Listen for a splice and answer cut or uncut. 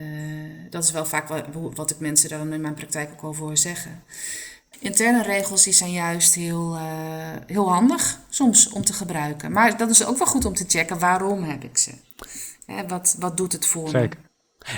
uncut